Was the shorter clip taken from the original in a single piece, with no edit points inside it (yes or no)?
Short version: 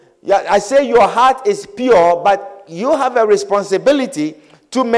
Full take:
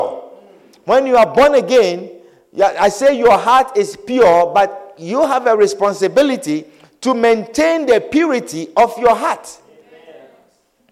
yes